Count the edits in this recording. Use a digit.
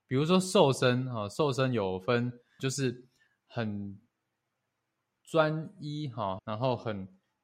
2